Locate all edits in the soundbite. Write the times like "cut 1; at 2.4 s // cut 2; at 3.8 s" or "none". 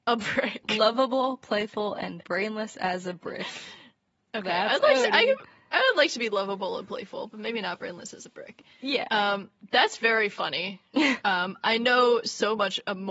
none